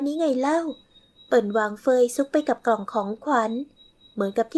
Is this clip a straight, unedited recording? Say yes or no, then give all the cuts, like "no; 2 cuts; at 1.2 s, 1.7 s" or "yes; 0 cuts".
yes; 0 cuts